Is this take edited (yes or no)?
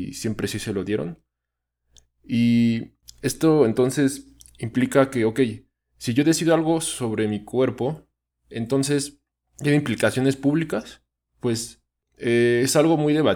no